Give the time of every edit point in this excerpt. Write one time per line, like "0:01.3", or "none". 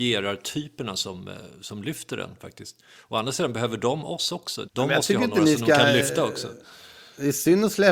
0:04.7